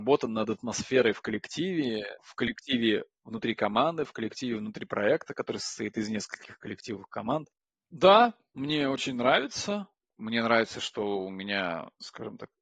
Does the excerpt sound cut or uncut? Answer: cut